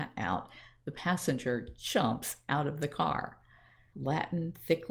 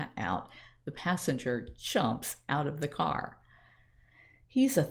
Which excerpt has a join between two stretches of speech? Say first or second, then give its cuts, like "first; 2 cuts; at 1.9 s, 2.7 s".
first; 1 cut; at 3.9 s